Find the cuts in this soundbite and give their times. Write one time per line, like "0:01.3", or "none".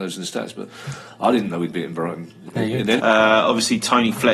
0:03.0